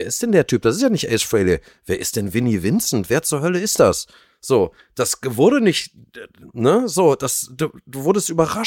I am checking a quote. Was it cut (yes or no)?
no